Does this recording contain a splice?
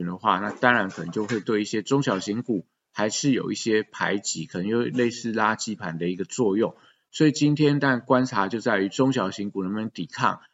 no; 0 cuts

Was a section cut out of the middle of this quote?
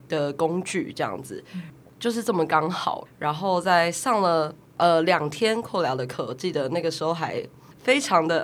yes; 1 cut; at 3.1 s

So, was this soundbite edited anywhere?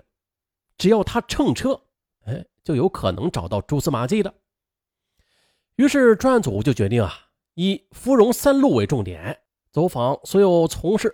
no; 0 cuts

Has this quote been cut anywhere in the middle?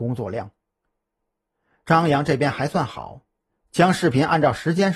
no; 0 cuts

